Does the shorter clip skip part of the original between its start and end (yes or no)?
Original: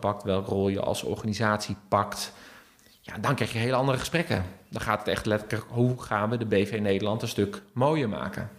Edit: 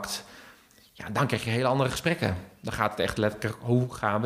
no